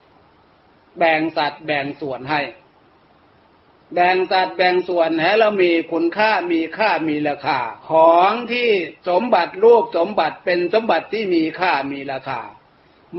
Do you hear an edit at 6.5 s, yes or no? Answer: no